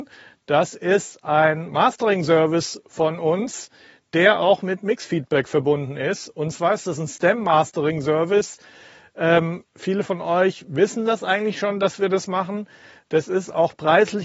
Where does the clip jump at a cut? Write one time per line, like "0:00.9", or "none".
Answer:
none

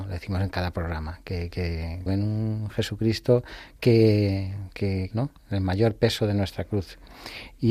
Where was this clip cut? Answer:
0:02.1
0:05.1

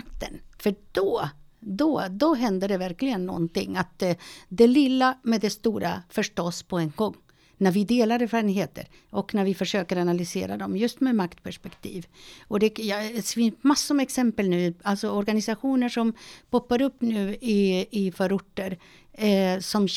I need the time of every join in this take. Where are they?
none

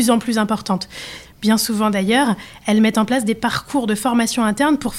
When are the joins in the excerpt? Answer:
0:01.3

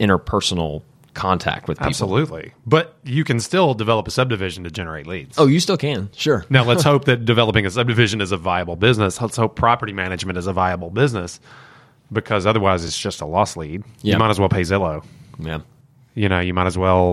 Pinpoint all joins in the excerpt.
none

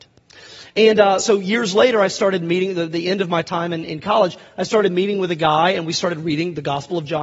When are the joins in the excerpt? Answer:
none

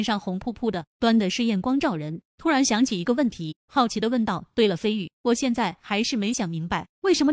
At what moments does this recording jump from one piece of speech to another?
0:02.3

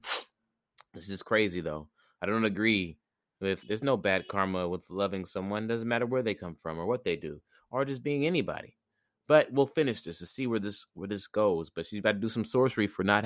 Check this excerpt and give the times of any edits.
0:03.6

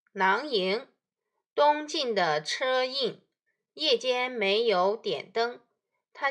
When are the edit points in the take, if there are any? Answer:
0:03.7

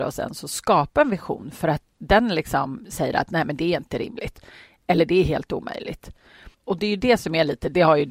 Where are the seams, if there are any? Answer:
0:01.9
0:06.5

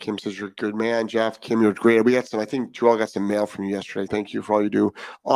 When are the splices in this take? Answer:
0:04.1

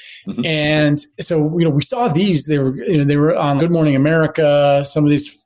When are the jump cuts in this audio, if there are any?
0:01.1
0:03.6

